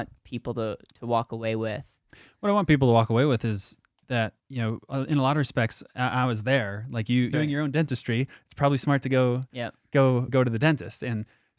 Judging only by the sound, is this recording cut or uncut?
cut